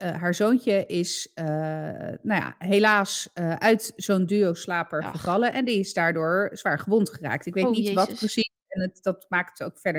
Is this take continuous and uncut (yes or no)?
yes